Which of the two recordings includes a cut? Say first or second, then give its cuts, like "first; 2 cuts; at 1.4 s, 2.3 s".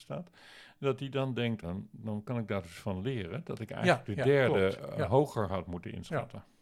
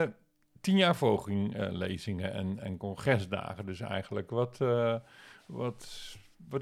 first; 1 cut; at 1.6 s